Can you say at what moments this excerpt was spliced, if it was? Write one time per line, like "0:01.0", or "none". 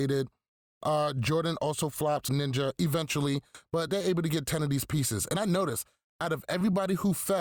0:02.3